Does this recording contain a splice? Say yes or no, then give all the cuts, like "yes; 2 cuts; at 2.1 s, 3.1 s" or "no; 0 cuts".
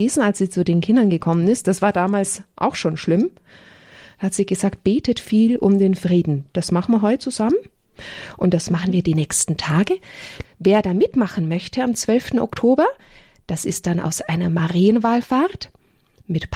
yes; 1 cut; at 10.4 s